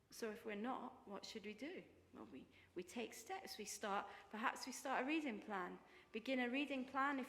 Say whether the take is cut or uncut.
uncut